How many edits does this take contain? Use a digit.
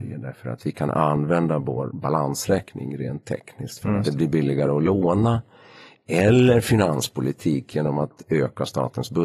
1